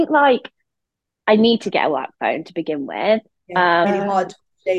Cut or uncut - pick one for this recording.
cut